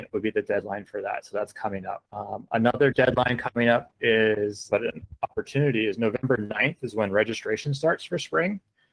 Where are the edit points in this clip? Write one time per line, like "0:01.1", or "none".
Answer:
0:02.1
0:04.7